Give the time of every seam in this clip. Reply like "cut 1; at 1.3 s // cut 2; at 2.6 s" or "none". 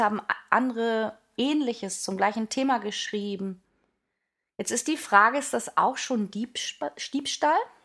none